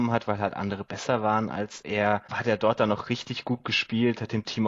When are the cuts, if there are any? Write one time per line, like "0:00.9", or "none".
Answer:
0:02.3